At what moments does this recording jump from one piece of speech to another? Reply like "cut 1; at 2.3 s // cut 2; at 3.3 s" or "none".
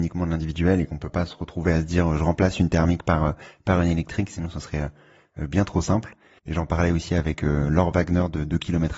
cut 1; at 6.4 s